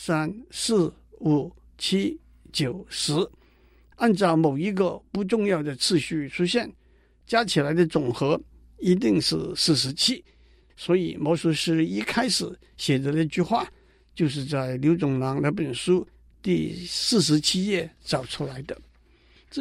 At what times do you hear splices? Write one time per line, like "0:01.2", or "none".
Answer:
none